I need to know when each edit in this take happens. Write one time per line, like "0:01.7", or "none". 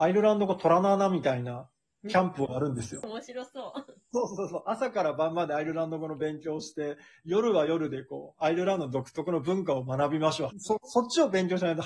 0:10.5